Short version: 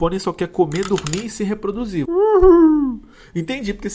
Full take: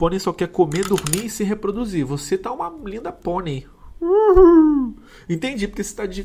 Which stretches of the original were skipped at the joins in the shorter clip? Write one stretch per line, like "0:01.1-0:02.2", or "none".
0:02.0-0:04.0